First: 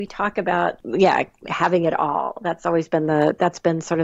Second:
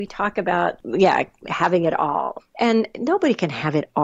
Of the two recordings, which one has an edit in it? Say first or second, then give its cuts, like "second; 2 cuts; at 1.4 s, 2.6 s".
second; 1 cut; at 2.4 s